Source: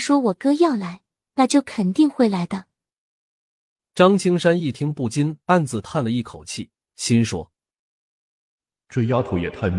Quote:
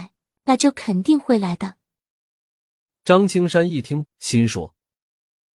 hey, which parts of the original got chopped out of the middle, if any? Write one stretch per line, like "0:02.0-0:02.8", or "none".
0:04.9-0:06.8